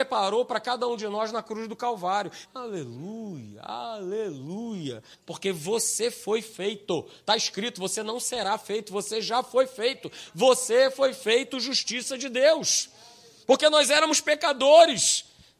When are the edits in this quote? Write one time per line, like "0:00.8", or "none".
0:02.4
0:05.1